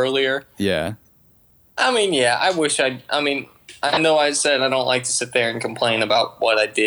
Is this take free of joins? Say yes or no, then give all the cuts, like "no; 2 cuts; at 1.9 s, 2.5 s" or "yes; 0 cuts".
yes; 0 cuts